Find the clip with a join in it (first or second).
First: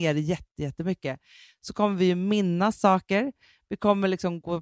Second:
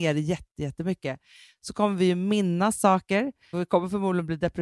second